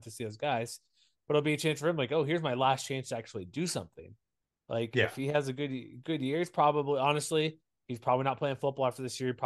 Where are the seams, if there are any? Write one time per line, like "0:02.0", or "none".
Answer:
none